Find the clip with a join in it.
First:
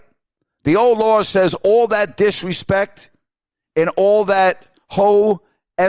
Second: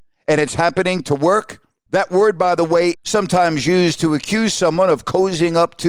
second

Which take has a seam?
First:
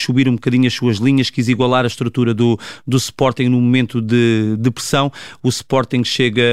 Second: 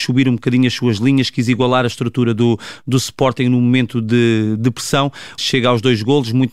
second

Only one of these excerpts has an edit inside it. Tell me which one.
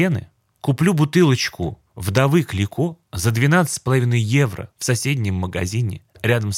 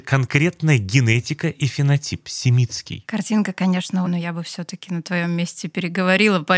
second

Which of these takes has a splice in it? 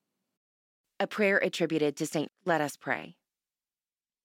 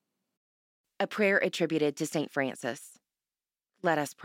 first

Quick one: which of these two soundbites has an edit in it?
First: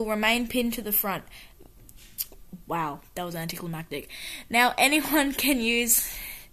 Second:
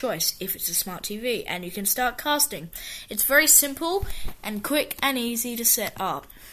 first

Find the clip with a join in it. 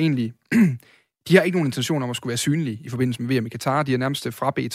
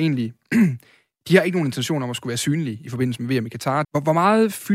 second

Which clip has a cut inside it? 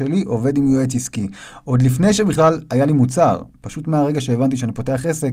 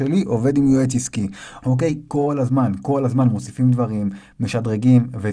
second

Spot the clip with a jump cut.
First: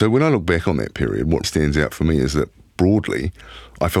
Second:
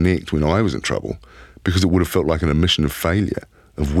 first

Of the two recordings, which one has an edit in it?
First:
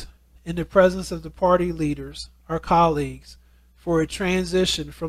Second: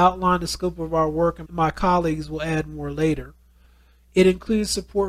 second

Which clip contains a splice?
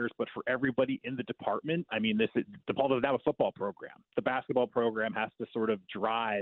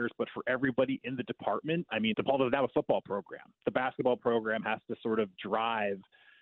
second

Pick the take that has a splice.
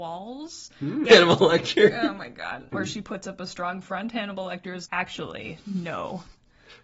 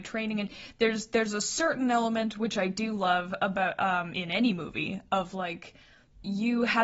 first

